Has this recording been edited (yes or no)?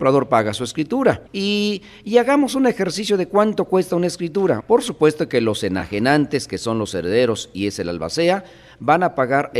yes